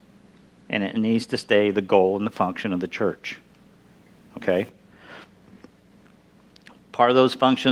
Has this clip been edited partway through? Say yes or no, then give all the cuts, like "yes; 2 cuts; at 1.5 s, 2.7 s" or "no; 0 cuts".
no; 0 cuts